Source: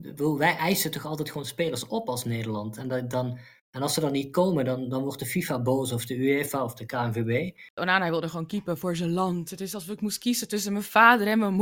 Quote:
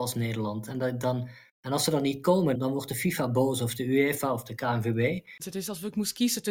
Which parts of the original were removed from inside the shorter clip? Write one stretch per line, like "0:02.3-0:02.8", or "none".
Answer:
0:04.7-0:04.9
0:07.7-0:09.5